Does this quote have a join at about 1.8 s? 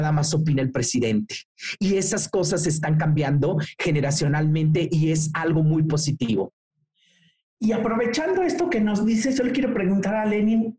no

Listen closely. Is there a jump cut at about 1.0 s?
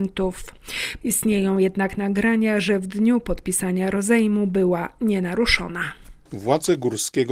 yes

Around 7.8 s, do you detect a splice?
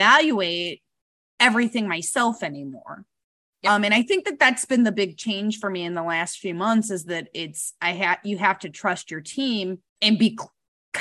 no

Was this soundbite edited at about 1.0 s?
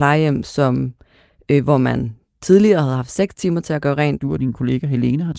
no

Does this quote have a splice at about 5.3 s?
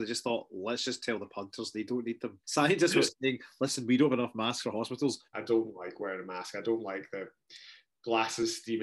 yes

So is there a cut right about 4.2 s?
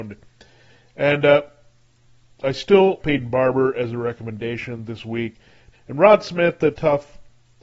no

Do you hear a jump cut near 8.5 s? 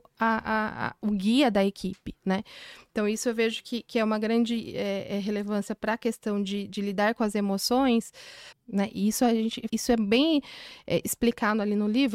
yes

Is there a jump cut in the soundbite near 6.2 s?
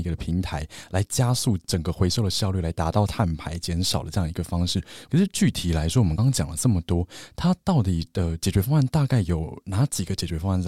yes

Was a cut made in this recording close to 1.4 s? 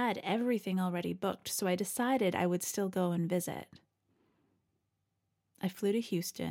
no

